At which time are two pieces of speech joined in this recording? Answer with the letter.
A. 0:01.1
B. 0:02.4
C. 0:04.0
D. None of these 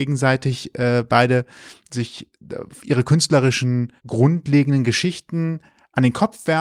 C